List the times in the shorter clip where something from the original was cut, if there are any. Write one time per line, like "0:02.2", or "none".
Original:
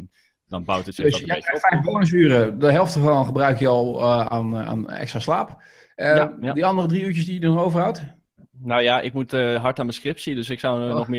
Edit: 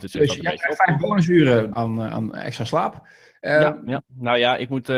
0:01.7
0:04.0

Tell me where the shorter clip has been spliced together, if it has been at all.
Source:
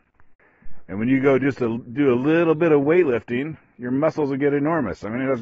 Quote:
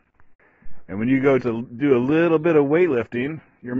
0:01.4

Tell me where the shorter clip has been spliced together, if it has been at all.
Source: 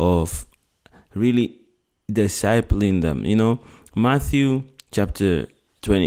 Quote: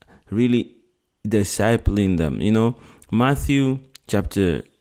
none

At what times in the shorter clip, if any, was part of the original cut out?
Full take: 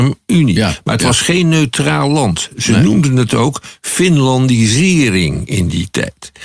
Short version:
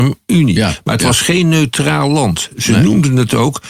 none

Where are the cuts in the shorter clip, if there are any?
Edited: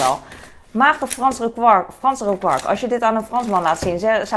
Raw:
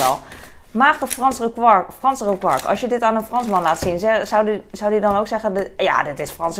none

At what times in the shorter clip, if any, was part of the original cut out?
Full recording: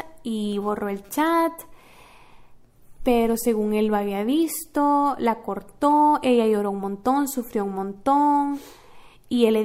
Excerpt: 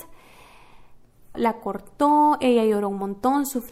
0:01.3

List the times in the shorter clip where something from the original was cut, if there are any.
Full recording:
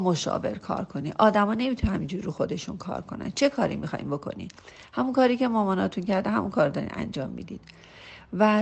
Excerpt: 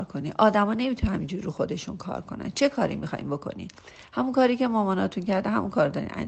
none

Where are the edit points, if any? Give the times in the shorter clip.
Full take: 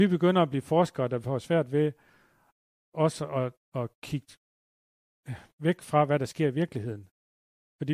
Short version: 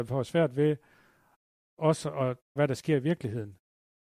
0:02.6

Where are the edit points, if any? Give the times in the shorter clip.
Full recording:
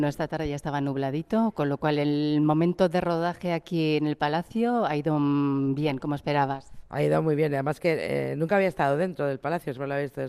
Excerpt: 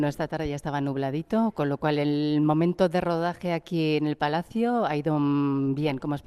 none

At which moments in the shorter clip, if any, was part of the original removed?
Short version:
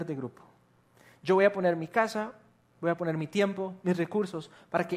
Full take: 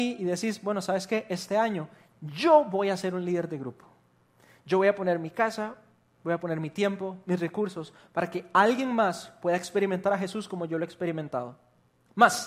none

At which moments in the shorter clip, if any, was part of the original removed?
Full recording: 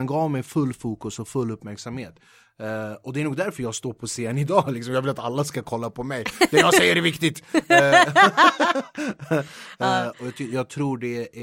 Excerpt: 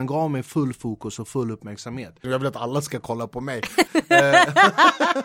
0:02.2
0:03.9

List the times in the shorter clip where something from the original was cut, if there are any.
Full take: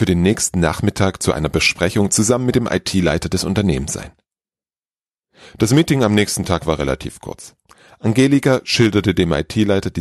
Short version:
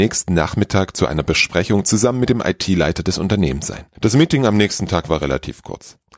0:03.9

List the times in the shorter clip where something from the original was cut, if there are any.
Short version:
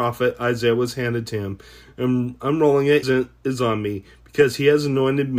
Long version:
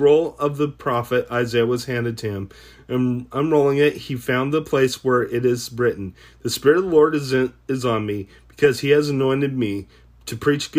0:03.0

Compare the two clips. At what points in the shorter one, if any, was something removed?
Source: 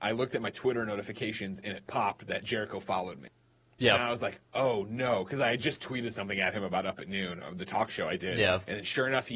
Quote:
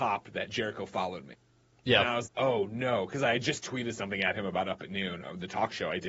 0:02.3

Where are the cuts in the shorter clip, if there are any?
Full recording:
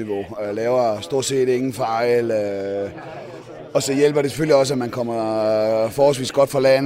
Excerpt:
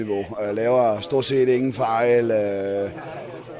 none

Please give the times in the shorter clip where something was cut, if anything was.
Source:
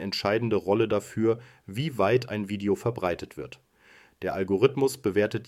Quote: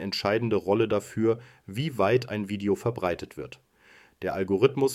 none

